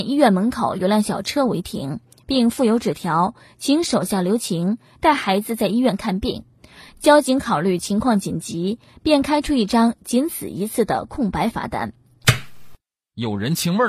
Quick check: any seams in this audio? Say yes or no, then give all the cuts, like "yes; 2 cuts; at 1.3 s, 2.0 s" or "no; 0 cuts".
no; 0 cuts